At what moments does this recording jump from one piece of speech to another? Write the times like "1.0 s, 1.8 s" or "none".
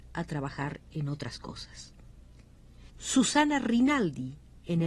2.9 s

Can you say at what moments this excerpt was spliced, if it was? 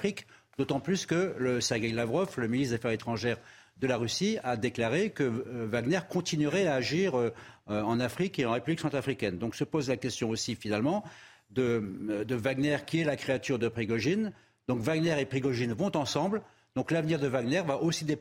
none

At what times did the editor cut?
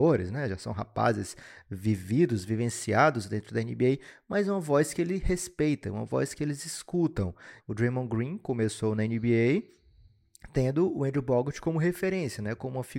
7.6 s

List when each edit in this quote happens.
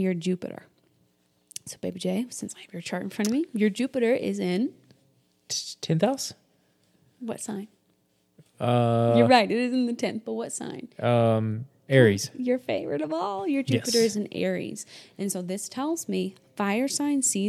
none

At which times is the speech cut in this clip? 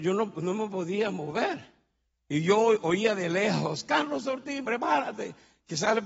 2.1 s, 4.6 s

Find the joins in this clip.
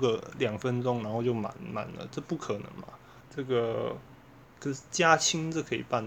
3.2 s, 4.5 s

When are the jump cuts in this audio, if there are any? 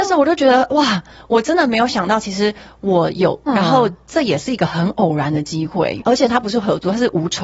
3.5 s, 6.0 s

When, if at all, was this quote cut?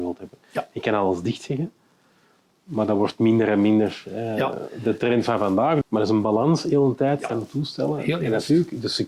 5.8 s, 7.3 s

